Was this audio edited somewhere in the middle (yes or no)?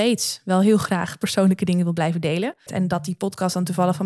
yes